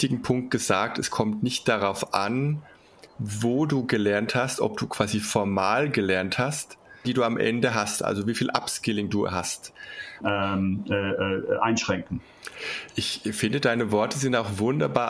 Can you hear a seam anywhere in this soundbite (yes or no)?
yes